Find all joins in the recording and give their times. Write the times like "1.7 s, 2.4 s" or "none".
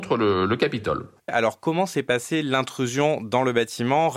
1.3 s